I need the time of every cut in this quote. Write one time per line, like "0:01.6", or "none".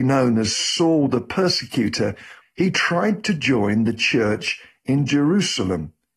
0:02.4